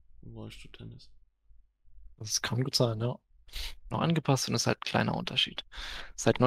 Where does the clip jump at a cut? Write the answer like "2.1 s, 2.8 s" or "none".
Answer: 2.1 s, 3.9 s